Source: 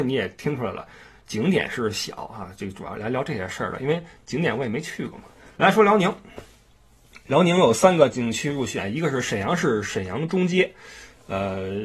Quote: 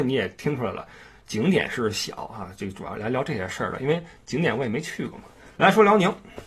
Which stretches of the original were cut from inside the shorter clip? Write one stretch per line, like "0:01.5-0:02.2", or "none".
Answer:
none